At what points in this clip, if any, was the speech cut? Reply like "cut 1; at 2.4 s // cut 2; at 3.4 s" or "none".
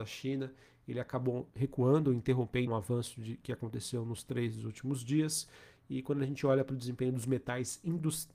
cut 1; at 2.7 s